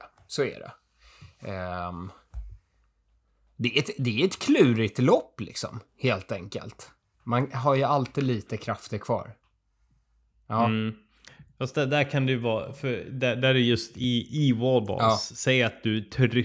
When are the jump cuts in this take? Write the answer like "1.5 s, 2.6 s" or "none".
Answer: 7.1 s